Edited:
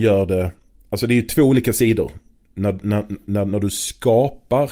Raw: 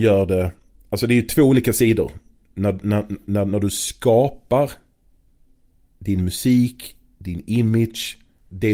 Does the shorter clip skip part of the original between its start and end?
no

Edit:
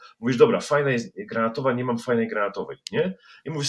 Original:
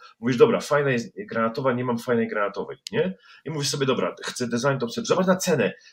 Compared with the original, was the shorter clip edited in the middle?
no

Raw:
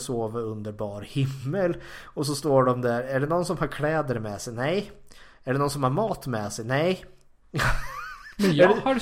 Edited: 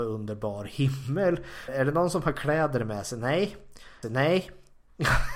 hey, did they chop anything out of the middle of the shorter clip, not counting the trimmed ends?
yes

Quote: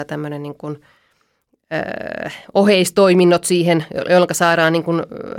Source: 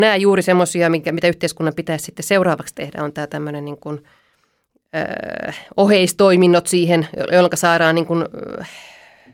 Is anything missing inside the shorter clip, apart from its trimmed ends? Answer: no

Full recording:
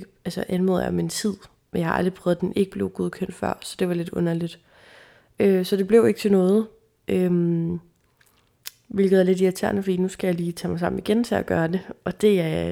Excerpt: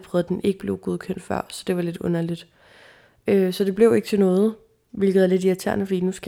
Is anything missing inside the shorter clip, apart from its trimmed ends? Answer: yes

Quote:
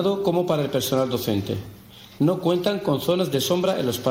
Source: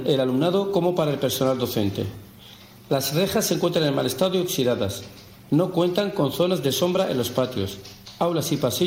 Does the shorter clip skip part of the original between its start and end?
yes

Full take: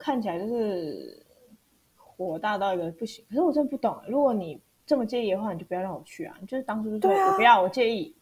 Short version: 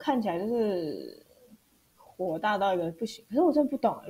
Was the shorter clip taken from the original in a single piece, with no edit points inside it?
yes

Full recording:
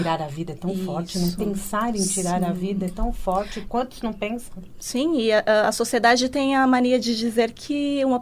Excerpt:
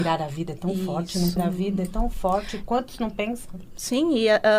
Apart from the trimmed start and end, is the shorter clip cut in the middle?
yes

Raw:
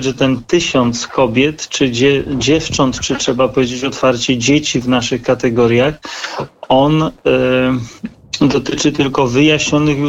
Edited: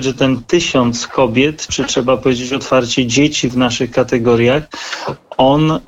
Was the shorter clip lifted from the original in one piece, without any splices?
no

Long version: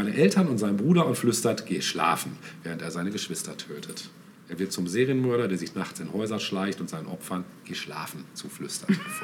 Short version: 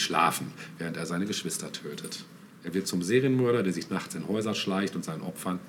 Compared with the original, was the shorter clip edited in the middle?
no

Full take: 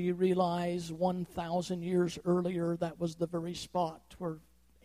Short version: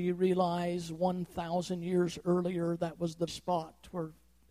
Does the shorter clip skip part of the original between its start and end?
yes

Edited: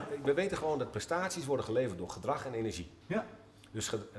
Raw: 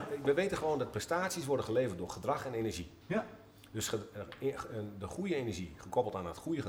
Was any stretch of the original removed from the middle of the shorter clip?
no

